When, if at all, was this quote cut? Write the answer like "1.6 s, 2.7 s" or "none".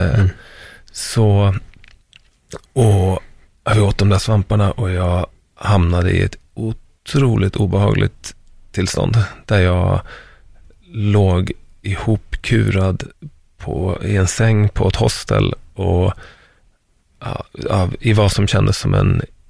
none